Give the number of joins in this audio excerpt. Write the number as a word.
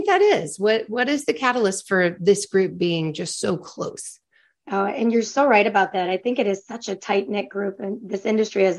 zero